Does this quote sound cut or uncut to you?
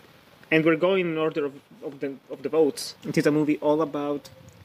cut